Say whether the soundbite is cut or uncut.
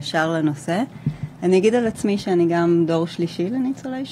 uncut